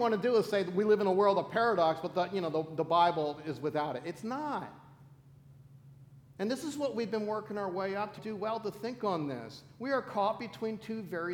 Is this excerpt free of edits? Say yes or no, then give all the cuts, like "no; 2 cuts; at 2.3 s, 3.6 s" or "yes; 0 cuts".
no; 1 cut; at 8.2 s